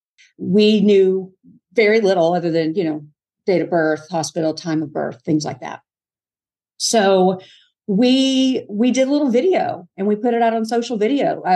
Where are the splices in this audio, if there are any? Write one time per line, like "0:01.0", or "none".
none